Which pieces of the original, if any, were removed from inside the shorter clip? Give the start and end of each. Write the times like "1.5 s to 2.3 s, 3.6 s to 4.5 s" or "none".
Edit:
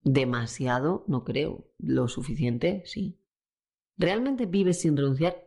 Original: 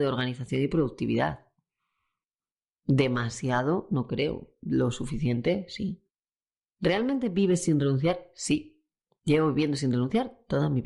none